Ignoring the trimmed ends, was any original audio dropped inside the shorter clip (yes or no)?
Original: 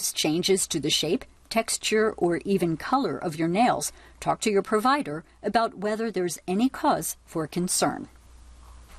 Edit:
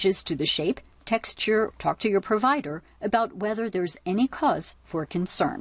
yes